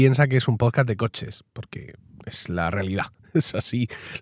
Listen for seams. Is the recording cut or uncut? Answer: uncut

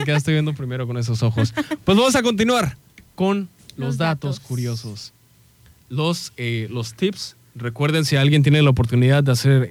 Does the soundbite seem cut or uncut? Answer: uncut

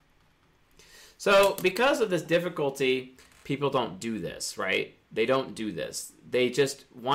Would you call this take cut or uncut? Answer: uncut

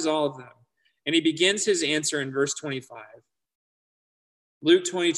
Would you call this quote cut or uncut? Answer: uncut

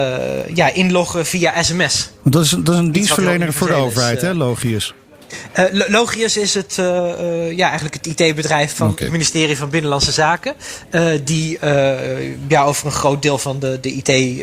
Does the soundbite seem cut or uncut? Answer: uncut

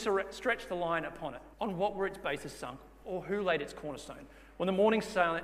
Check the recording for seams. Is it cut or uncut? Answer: cut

